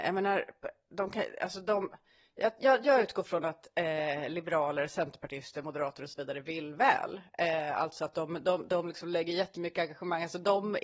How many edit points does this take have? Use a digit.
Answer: 1